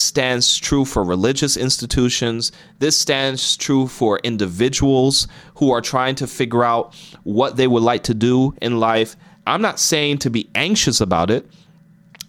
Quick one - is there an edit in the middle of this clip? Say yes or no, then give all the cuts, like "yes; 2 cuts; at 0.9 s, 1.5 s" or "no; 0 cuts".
yes; 1 cut; at 9.3 s